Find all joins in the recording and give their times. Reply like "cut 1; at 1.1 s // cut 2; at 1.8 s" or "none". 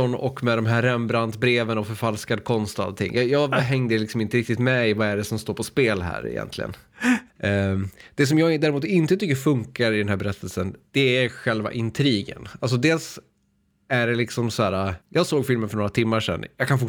cut 1; at 7.3 s // cut 2; at 15.0 s